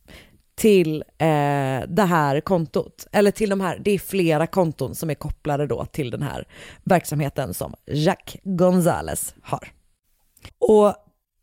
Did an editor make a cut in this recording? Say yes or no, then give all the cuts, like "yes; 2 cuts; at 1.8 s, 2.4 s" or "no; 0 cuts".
yes; 1 cut; at 10.5 s